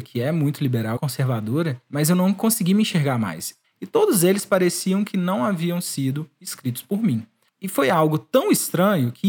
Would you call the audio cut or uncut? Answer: cut